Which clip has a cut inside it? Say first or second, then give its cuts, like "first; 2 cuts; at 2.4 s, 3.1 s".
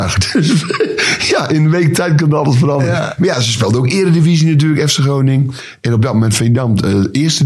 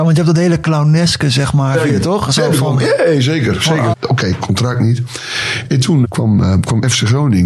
second; 3 cuts; at 1.7 s, 3.9 s, 6.0 s